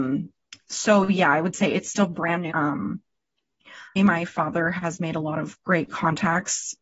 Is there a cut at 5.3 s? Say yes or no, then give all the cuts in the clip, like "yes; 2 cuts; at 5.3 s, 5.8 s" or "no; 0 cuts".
no; 2 cuts; at 2.5 s, 4.0 s